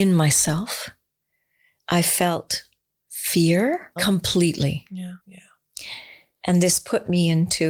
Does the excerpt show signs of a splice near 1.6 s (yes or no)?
no